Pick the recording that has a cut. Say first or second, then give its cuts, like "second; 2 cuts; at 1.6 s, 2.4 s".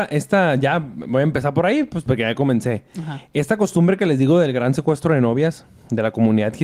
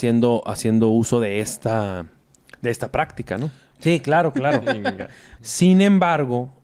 second; 2 cuts; at 3.7 s, 5.4 s